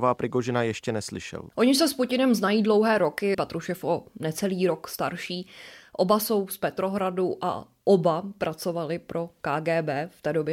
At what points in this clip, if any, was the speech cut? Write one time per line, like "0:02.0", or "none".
0:01.5
0:03.3